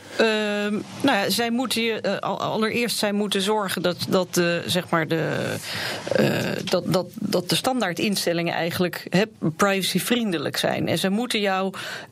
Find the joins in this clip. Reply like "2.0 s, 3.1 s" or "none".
none